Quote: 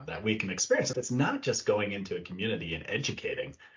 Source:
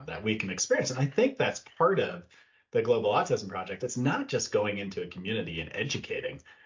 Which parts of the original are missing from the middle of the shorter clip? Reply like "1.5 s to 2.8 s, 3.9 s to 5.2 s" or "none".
0.9 s to 3.8 s